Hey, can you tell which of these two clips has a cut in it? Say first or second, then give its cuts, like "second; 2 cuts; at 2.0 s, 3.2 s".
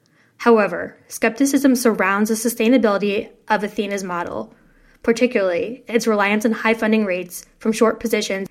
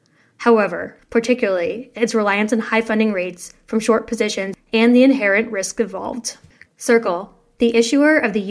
second; 2 cuts; at 1.0 s, 6.7 s